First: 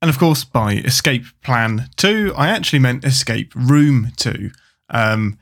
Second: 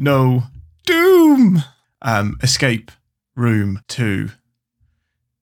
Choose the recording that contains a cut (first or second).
second